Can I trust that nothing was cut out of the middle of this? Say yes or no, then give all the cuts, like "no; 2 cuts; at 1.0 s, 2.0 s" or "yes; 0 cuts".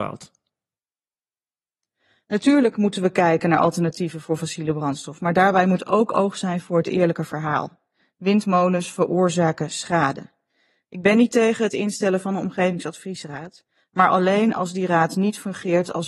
yes; 0 cuts